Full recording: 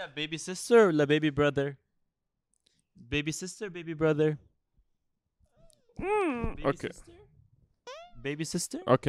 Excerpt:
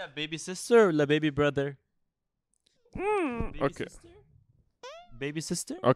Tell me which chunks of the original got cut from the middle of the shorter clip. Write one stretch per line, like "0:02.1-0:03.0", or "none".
0:02.8-0:05.8